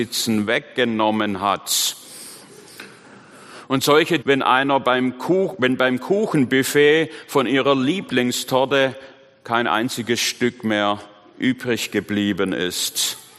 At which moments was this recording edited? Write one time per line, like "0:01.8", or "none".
0:04.2

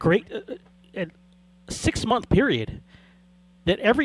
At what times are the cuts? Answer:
none

